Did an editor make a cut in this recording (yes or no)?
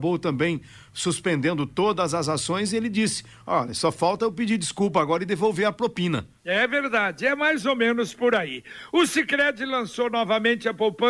yes